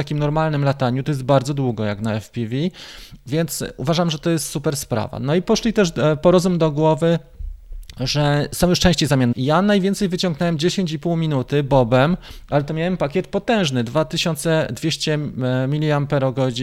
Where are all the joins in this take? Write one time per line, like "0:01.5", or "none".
0:09.3